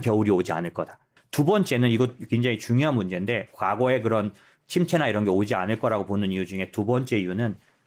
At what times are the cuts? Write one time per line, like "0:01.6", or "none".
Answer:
0:01.2